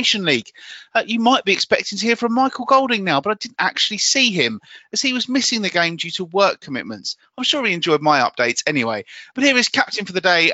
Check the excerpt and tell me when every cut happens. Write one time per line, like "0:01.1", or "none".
none